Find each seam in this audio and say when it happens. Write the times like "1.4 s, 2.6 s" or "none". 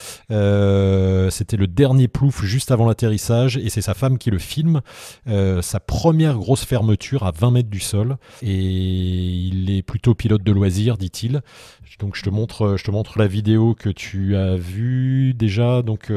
8.4 s